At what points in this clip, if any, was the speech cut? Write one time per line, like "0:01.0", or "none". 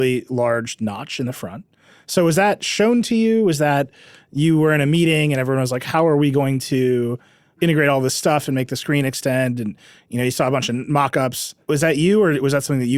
none